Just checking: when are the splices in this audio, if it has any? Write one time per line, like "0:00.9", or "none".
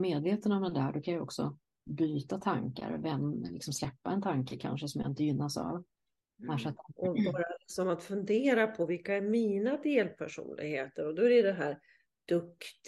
0:07.0